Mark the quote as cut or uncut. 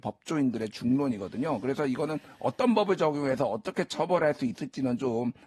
uncut